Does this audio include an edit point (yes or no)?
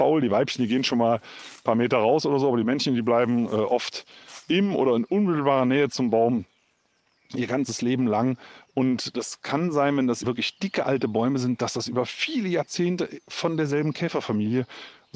yes